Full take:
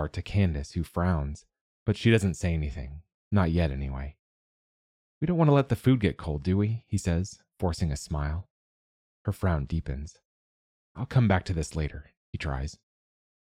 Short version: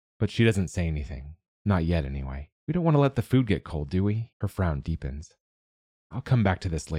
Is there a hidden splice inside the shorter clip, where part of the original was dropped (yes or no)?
yes